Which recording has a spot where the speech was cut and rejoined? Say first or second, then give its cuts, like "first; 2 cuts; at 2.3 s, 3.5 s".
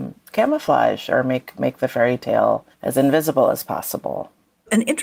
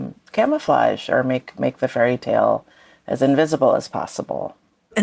first; 1 cut; at 2.7 s